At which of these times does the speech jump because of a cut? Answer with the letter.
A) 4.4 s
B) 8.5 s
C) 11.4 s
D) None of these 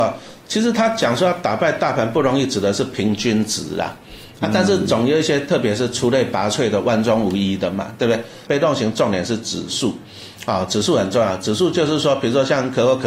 B